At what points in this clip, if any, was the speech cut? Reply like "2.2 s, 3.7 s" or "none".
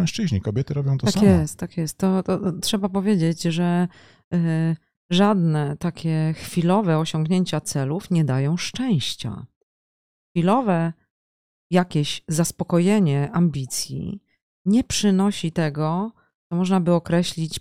none